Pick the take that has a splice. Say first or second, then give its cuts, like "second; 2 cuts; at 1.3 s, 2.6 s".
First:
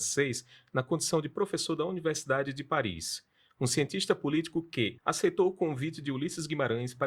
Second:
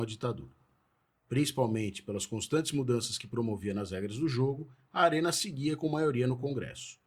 first; 1 cut; at 5.0 s